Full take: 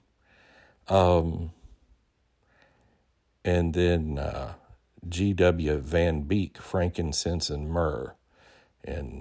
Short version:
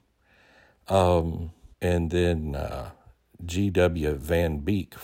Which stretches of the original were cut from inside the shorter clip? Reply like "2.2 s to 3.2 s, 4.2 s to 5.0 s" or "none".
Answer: 1.7 s to 3.4 s